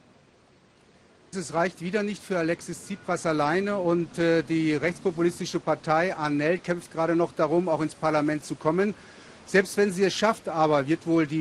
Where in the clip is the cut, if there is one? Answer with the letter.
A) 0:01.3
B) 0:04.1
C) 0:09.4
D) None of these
A